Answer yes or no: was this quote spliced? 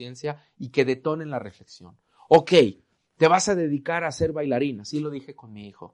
no